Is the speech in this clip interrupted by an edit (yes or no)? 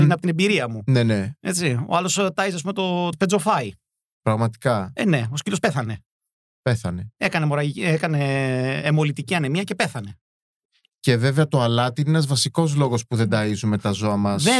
yes